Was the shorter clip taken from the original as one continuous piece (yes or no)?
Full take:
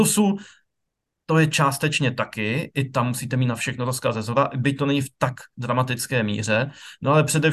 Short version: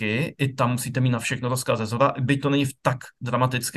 yes